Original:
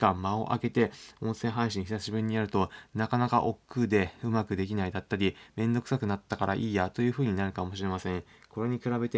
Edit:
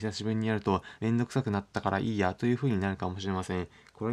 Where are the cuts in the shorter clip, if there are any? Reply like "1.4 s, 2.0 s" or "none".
1.0 s